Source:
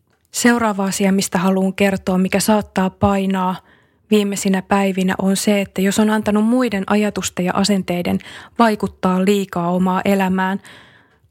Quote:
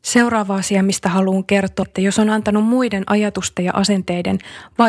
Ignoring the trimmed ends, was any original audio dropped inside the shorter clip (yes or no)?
yes